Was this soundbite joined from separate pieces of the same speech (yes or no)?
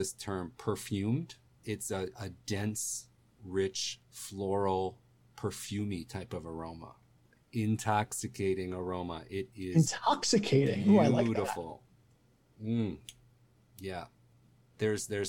no